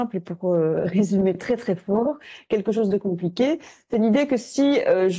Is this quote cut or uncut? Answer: uncut